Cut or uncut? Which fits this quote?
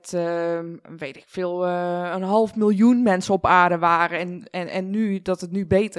uncut